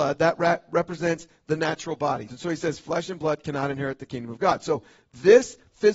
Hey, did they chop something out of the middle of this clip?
yes; 1 cut; at 2.3 s

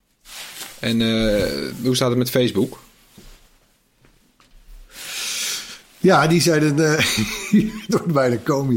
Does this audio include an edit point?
no; 0 cuts

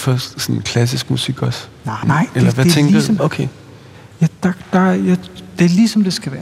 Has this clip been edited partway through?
yes; 2 cuts; at 2.0 s, 3.2 s

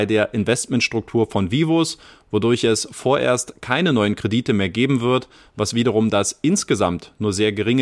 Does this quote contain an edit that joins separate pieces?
no; 0 cuts

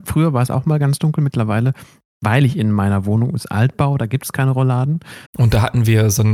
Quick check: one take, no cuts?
no; 1 cut; at 5.3 s

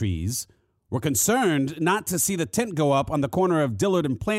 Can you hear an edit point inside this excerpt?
no; 0 cuts

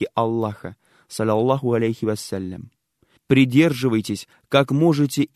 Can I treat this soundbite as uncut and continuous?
no; 1 cut; at 3.2 s

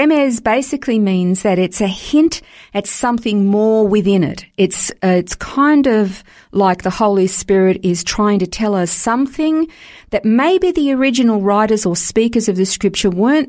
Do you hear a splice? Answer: no; 0 cuts

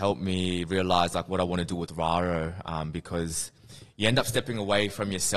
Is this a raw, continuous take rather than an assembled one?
yes; 0 cuts

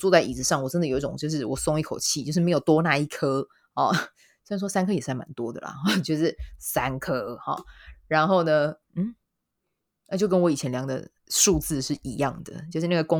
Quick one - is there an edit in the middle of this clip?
yes; 2 cuts; at 8.8 s, 11.2 s

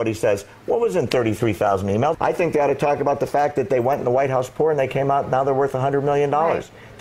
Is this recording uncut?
no; 1 cut; at 2.1 s

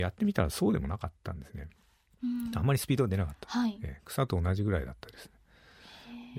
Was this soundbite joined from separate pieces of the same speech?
no; 0 cuts

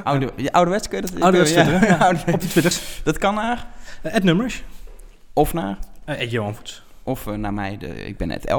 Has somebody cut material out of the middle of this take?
no; 0 cuts

